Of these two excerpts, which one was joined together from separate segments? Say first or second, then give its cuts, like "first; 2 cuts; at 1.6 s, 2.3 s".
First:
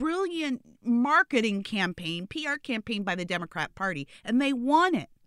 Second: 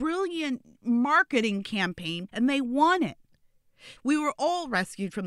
second; 2 cuts; at 2.3 s, 4.0 s